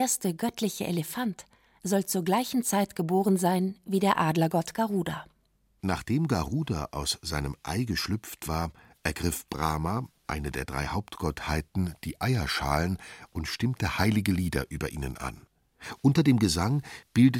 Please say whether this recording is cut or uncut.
uncut